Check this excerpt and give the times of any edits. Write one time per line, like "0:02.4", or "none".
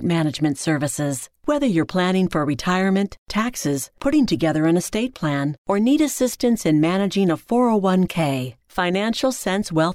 none